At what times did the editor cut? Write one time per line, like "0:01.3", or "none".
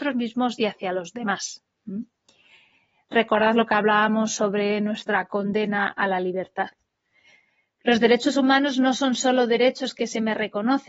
none